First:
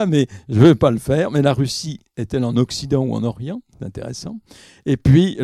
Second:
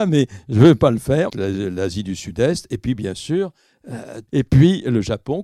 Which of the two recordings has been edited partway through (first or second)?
second